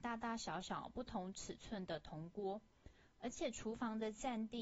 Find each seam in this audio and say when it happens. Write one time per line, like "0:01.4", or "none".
none